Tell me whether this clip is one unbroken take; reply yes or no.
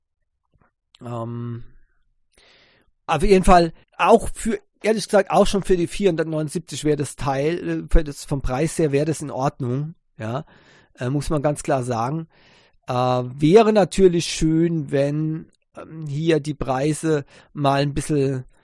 no